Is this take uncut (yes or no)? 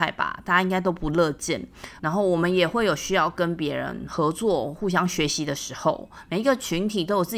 no